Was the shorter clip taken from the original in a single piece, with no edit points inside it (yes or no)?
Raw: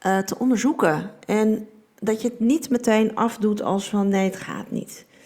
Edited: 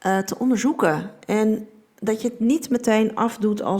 yes